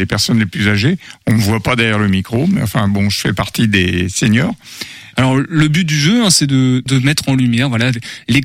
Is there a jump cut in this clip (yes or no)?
yes